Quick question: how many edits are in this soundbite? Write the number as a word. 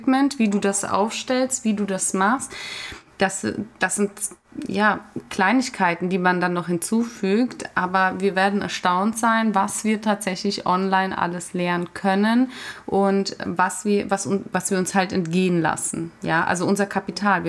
zero